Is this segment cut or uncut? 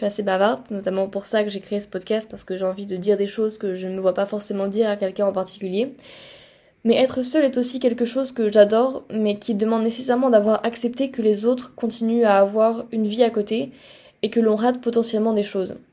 uncut